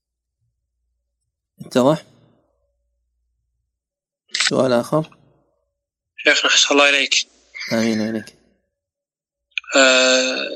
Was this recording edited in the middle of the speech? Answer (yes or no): yes